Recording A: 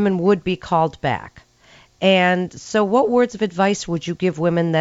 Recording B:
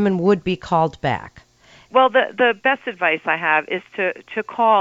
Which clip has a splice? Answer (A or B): B